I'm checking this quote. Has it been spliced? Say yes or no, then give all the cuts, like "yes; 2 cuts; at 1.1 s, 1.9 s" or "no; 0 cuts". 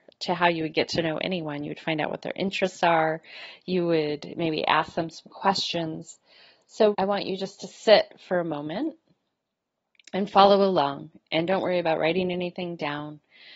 yes; 1 cut; at 6.9 s